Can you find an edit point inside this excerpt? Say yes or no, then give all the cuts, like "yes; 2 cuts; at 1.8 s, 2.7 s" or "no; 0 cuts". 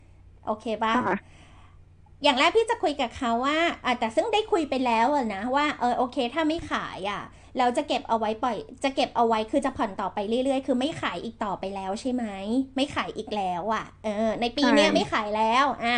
no; 0 cuts